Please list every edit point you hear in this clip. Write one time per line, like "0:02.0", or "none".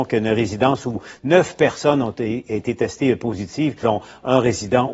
0:03.8